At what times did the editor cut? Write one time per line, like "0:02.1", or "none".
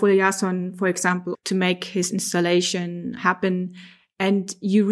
0:01.3
0:03.2